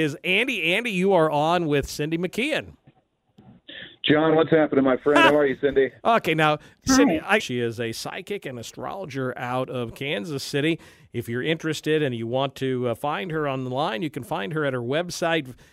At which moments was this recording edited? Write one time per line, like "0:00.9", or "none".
0:07.4